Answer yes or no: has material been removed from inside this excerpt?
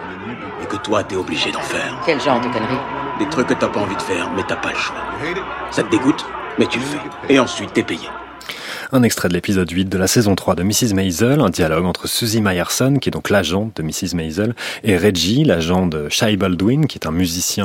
no